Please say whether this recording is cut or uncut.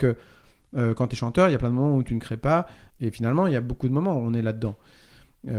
cut